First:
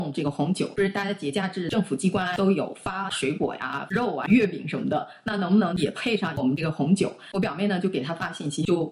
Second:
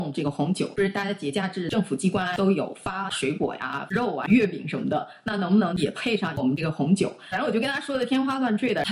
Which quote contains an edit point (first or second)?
first